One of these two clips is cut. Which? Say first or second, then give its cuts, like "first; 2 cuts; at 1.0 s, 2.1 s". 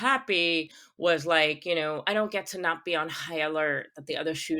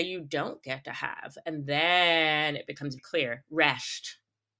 second; 1 cut; at 3.0 s